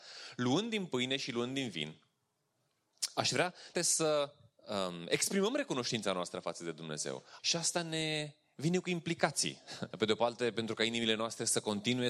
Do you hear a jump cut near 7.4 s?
yes; 3 cuts; at 3.7 s, 7.4 s, 9.9 s

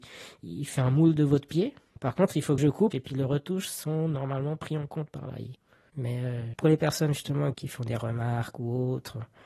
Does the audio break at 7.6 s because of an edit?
no; 3 cuts; at 1.9 s, 2.9 s, 5.9 s

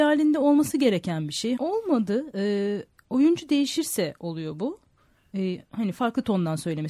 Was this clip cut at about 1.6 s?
yes; 1 cut; at 1.6 s

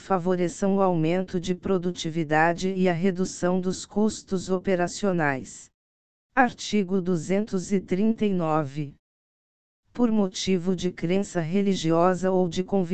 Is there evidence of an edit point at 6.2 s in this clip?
yes; 1 cut; at 6.2 s

